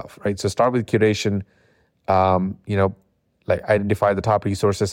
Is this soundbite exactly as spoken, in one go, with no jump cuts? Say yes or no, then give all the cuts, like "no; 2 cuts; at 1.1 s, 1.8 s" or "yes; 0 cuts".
yes; 0 cuts